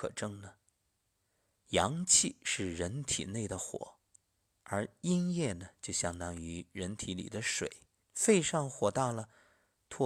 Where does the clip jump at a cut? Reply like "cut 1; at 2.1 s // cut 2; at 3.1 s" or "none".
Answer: cut 1; at 8.0 s